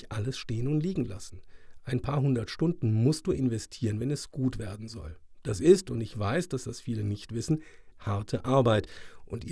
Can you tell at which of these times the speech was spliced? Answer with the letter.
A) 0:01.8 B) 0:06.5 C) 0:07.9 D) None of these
C